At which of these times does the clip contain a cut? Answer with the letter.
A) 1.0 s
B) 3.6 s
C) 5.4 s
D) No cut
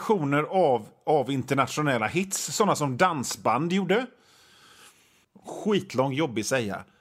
C